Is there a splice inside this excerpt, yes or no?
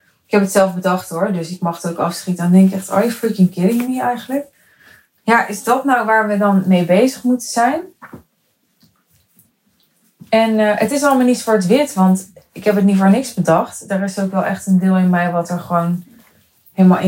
no